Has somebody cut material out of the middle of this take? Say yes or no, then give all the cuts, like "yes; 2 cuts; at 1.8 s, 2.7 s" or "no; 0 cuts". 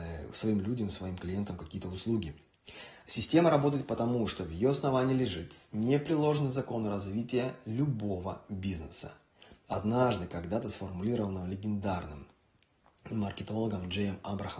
no; 0 cuts